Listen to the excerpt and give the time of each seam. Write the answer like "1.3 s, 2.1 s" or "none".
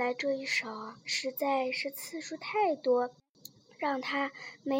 1.0 s